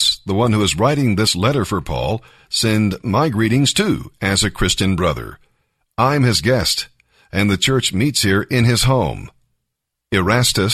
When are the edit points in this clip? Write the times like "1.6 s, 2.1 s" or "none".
5.8 s